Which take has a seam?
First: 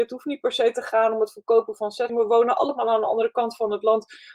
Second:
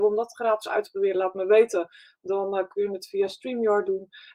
first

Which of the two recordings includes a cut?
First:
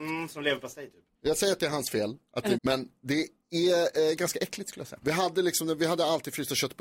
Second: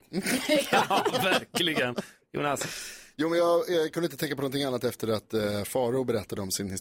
first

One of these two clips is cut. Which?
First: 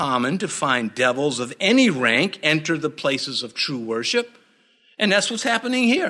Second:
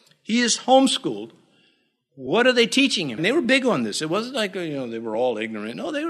second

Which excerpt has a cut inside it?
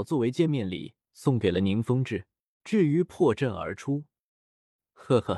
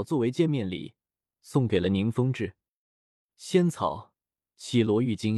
first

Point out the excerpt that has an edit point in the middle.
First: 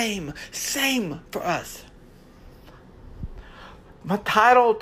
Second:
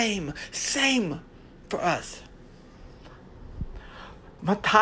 first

